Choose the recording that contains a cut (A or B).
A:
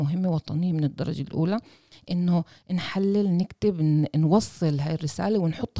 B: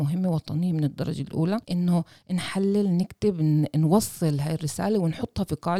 B